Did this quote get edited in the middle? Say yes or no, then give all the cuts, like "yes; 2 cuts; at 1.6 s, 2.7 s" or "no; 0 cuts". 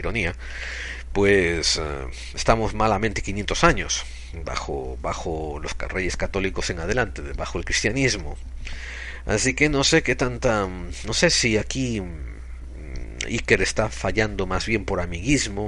no; 0 cuts